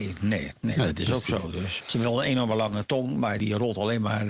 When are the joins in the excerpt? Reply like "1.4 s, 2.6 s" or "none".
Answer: 1.8 s, 3.4 s